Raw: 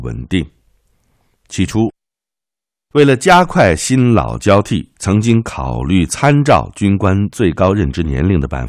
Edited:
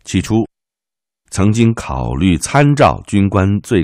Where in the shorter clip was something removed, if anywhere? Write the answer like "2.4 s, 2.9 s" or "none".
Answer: 1.3 s